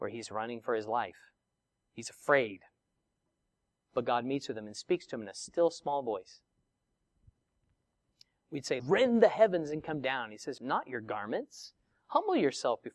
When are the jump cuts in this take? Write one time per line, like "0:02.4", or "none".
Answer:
0:08.8
0:10.6